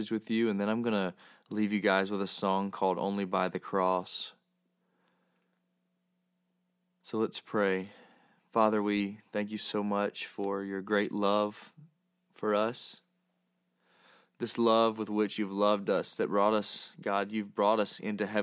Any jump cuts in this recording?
no; 0 cuts

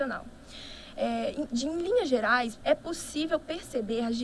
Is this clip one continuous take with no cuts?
no; 1 cut; at 2.6 s

